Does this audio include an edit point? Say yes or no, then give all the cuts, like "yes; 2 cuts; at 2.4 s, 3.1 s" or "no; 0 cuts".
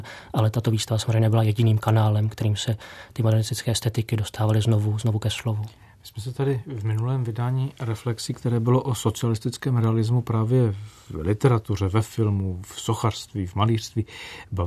no; 0 cuts